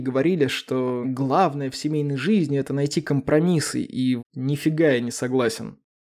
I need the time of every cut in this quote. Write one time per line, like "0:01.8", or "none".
0:01.0
0:04.2